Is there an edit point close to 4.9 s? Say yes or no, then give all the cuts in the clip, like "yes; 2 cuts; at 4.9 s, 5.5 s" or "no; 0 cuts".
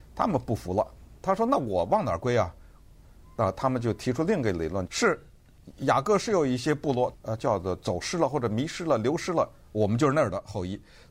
yes; 2 cuts; at 4.9 s, 7.1 s